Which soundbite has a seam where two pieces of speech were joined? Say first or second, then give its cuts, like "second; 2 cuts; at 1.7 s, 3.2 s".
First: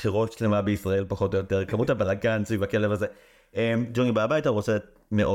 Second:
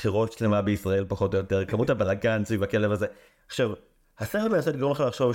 second; 1 cut; at 3.3 s